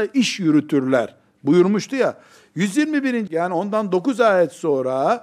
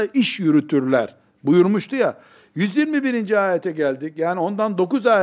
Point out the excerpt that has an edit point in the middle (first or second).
first